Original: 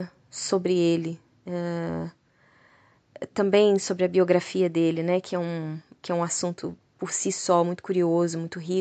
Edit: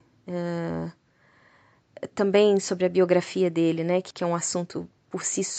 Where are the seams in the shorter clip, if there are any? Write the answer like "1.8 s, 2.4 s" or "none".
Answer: 4.1 s

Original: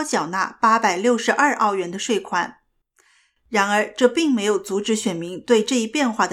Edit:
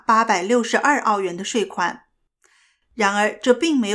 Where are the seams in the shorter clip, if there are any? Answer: none

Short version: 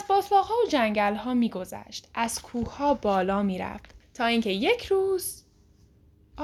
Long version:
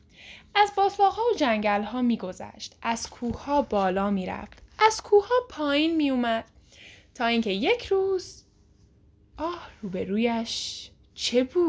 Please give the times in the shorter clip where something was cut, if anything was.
4.0 s

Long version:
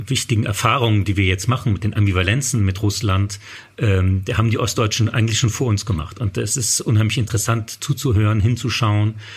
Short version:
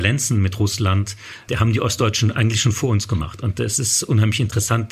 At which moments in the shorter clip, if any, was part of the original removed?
1.5 s

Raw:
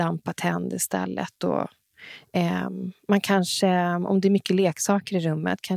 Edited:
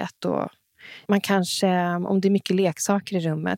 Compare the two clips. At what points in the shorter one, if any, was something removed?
1.1 s

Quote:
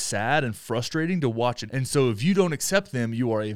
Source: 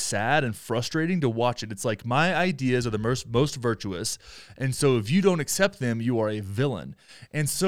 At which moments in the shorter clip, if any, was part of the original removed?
1.7 s

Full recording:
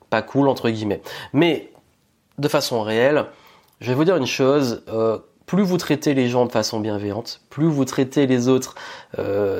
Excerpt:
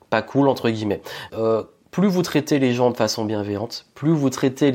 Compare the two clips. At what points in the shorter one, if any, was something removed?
1.3 s

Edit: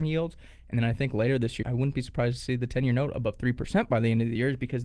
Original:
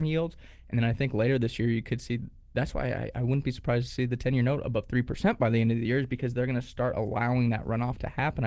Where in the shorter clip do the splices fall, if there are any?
1.6 s

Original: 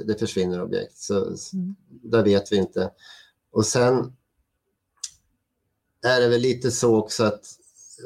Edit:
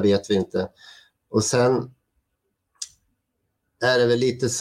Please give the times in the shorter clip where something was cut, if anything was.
none

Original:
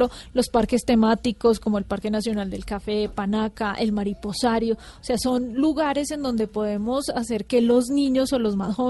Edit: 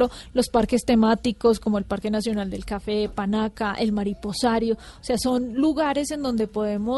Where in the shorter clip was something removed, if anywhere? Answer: none

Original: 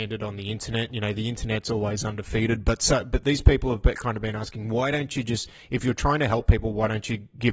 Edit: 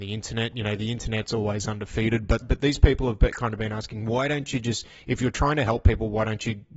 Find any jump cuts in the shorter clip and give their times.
2.4 s

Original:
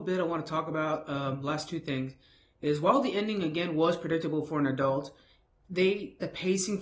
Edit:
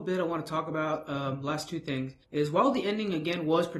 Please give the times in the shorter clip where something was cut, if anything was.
2.2 s

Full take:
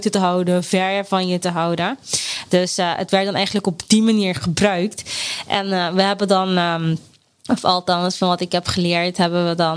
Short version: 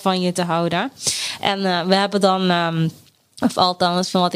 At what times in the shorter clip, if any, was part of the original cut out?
1.4 s

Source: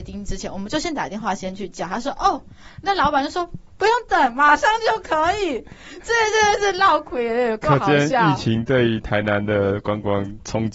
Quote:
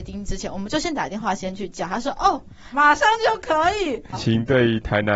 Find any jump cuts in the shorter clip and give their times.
2.7 s, 4.1 s

